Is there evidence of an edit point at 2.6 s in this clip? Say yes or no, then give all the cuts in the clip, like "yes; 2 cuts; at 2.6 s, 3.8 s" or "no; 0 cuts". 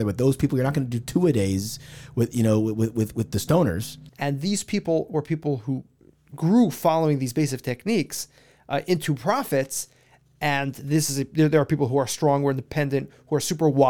no; 1 cut; at 4.1 s